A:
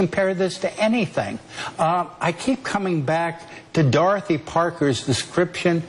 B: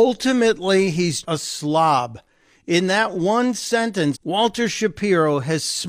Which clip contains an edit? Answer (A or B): B